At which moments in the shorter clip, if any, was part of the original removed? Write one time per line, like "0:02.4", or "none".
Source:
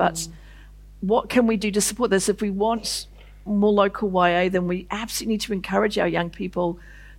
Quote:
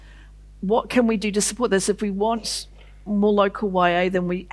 none

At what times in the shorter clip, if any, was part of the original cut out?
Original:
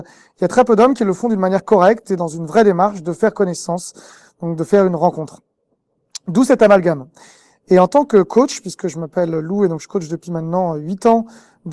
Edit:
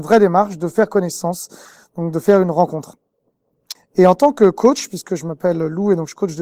0:03.7

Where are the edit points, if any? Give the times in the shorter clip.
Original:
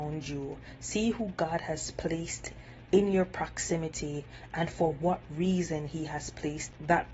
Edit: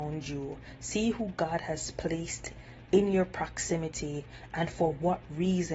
none

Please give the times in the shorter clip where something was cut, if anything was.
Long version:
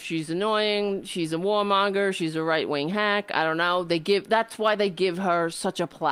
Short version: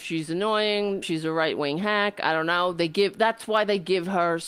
0:01.0

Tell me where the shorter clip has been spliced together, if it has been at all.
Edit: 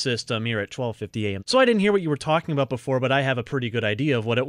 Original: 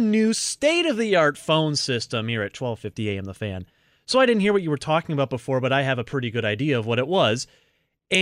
0:01.4

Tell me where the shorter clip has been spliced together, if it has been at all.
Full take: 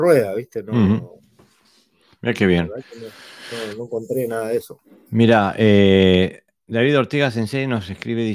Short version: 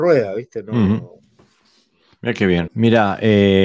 0:02.7

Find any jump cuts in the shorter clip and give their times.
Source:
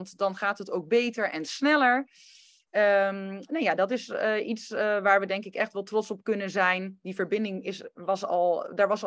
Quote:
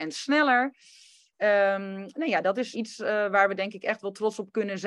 0:02.7

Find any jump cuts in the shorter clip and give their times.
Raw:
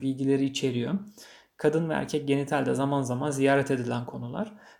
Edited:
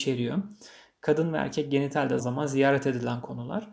0:02.2

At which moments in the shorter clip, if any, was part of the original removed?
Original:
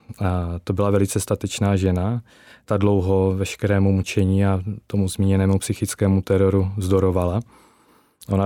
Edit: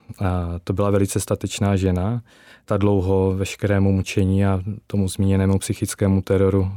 none

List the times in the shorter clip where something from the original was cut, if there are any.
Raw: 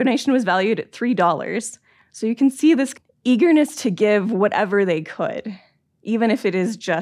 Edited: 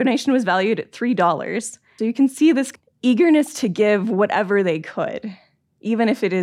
0:02.0

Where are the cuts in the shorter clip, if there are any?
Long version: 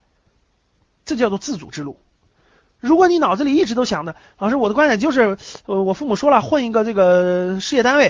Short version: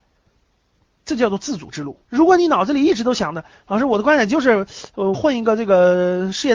0:02.0
0:05.1

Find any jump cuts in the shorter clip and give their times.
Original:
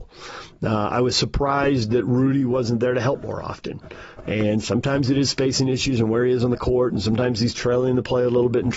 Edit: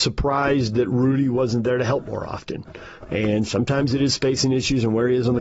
none

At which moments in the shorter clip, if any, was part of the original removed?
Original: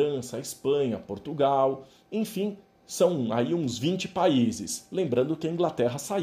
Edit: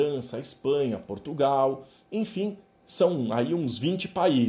none

